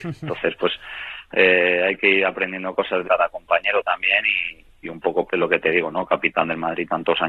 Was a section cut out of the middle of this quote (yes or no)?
yes